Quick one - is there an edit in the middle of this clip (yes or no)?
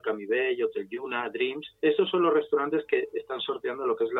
yes